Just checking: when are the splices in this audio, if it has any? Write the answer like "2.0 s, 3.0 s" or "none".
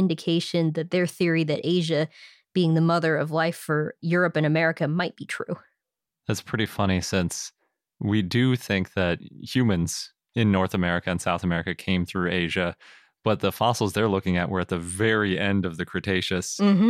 none